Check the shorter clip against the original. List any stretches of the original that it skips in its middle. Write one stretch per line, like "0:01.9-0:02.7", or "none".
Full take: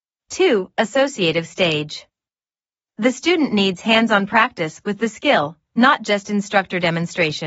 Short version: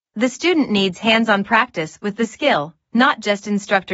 none